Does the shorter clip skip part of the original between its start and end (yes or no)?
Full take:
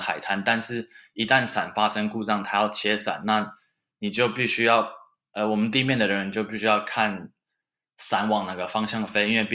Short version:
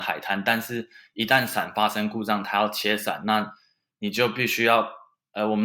no